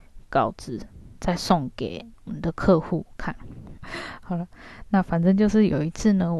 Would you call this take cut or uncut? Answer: cut